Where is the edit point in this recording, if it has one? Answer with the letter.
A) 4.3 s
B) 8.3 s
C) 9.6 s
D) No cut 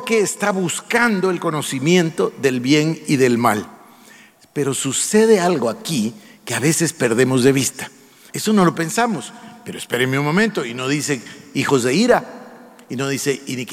B